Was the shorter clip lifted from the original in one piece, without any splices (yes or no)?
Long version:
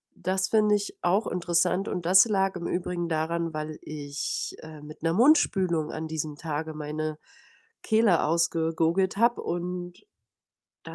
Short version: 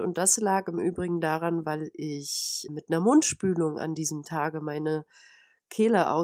no